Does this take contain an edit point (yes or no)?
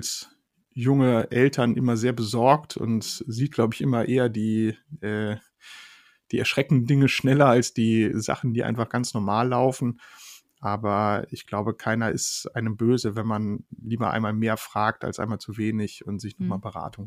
no